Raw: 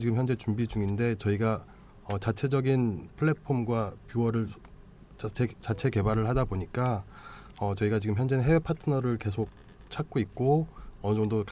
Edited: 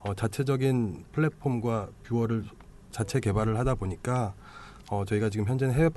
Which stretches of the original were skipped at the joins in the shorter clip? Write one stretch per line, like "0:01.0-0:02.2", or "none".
0:04.9-0:05.5